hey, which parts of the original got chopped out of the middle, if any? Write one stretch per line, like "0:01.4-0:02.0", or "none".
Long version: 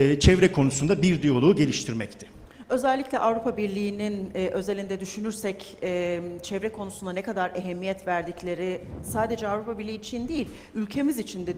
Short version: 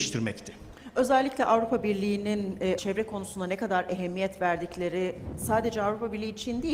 0:04.5-0:06.4